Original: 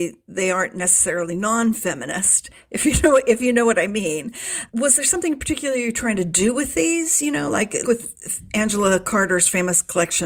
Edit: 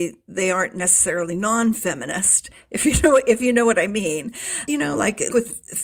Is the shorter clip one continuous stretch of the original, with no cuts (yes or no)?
no